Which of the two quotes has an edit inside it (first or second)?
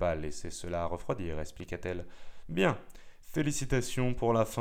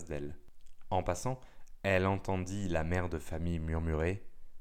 first